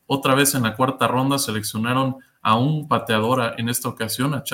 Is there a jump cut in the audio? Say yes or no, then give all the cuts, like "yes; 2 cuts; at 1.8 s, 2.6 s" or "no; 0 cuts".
no; 0 cuts